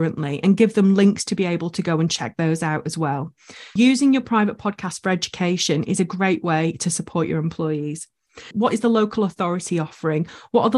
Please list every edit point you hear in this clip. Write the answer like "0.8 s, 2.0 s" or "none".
3.8 s, 8.5 s

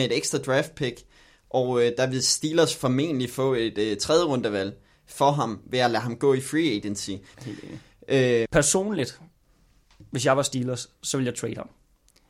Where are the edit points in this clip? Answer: 7.3 s, 8.4 s

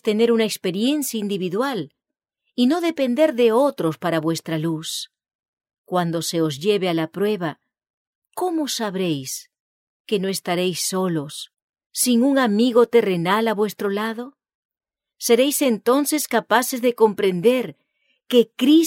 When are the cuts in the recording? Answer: none

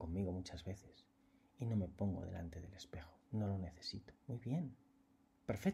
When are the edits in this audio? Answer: 4.2 s

